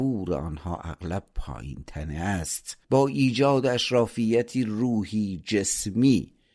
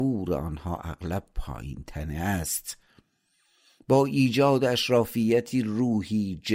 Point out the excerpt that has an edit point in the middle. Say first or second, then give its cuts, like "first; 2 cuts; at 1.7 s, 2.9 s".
first; 1 cut; at 2.8 s